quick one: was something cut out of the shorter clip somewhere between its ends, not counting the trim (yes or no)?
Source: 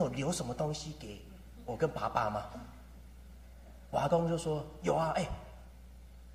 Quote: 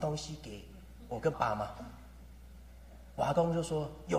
yes